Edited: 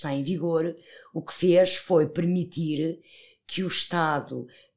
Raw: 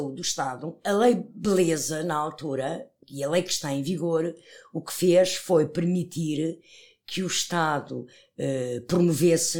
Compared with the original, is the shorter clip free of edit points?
yes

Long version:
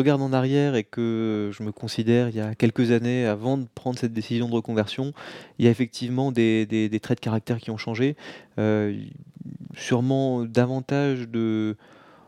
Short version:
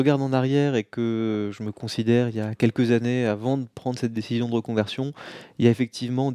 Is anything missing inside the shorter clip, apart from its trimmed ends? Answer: no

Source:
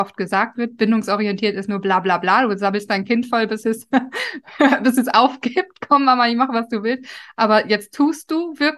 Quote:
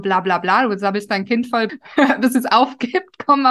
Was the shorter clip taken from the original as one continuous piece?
no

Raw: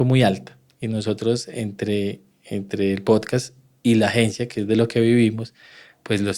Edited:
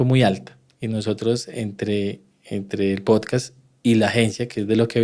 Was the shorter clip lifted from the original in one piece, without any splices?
yes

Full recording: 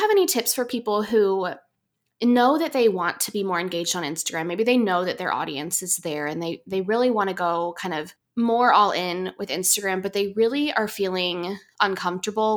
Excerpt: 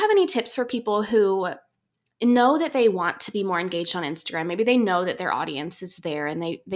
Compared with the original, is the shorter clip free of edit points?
yes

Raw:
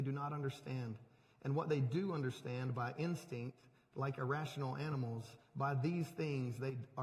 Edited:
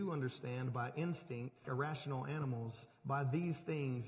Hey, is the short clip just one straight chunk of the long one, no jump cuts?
no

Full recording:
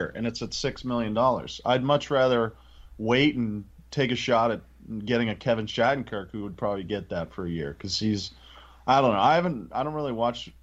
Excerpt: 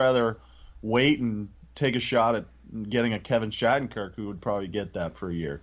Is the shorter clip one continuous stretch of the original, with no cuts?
yes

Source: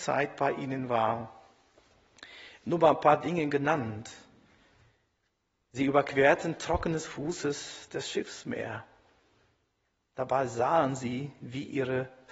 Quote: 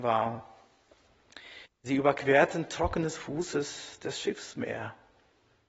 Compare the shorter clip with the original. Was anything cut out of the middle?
yes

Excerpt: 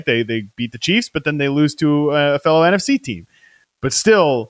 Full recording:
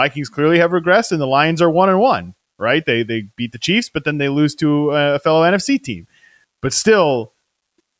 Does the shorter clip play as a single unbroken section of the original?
yes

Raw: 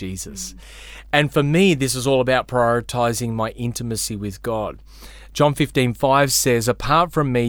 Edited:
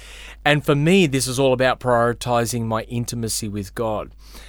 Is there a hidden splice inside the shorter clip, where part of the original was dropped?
no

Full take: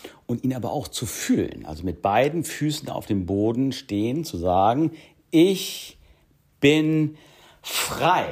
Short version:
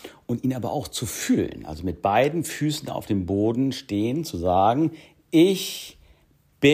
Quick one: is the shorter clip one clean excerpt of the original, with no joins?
yes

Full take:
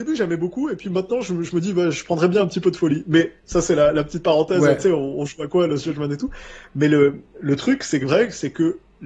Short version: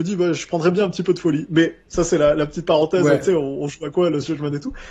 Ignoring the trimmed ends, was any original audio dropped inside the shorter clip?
no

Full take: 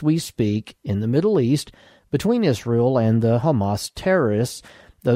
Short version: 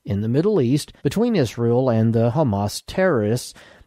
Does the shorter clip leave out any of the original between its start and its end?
yes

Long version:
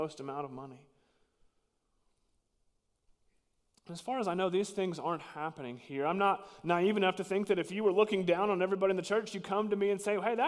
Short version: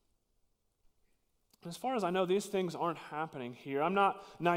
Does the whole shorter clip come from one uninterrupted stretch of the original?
yes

